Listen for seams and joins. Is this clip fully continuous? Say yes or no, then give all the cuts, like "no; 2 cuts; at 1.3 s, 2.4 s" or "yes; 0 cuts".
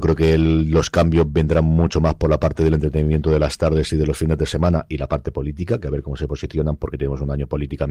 yes; 0 cuts